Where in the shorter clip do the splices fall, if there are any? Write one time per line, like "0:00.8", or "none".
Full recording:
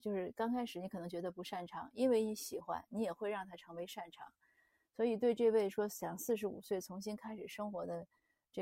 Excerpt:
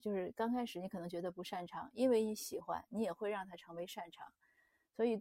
none